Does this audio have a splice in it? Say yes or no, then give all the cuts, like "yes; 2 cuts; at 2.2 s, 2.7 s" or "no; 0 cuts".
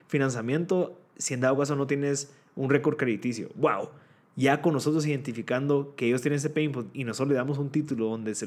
no; 0 cuts